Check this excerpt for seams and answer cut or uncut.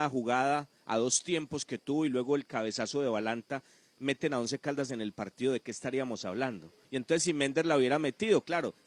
cut